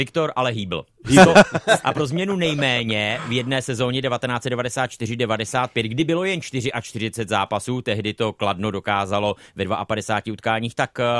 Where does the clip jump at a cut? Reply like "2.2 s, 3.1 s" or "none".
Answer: 1.8 s